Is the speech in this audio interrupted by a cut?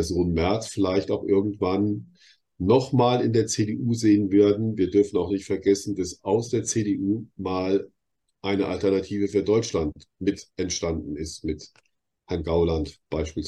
no; 0 cuts

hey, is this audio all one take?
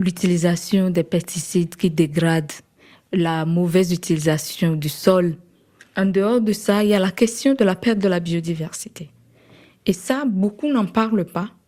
yes; 0 cuts

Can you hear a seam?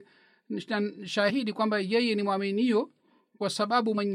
no; 0 cuts

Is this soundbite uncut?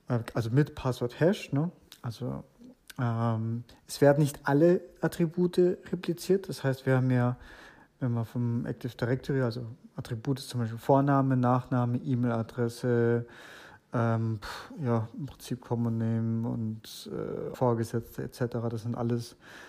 no; 1 cut; at 17.5 s

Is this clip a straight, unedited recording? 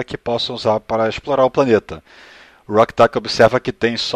yes; 0 cuts

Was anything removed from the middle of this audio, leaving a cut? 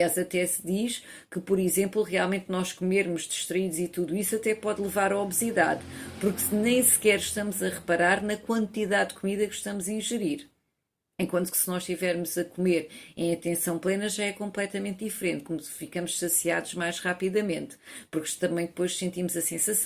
no; 0 cuts

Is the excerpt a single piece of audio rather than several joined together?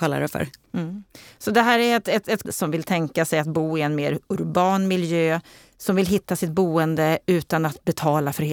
no; 1 cut; at 2.4 s

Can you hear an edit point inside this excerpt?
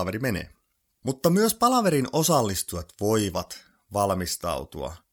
no; 0 cuts

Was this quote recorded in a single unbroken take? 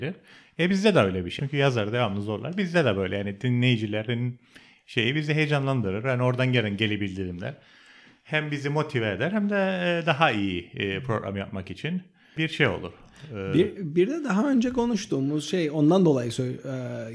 no; 1 cut; at 1.4 s

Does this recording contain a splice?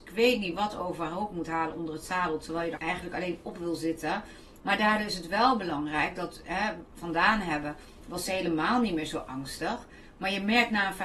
yes; 3 cuts; at 2.8 s, 4.6 s, 6.9 s

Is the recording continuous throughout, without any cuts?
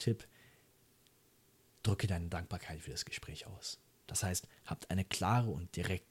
no; 1 cut; at 4.1 s

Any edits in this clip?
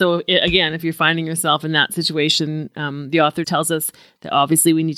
yes; 1 cut; at 3.4 s

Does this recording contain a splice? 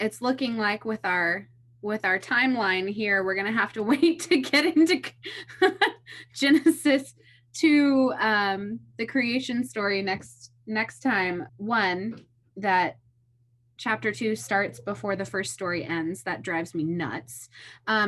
yes; 1 cut; at 11.5 s

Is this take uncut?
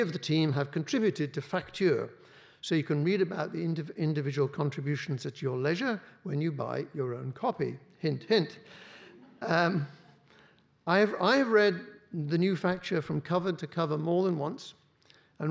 yes; 0 cuts

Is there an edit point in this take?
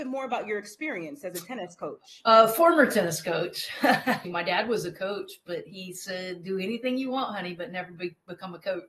yes; 1 cut; at 4.2 s

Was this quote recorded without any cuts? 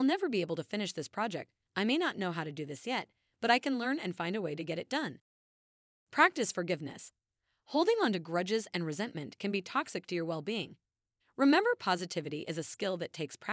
no; 2 cuts; at 1.6 s, 11.2 s

